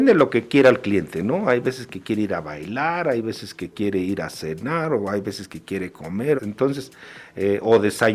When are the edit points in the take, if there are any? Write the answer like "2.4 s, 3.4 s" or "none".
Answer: 6.4 s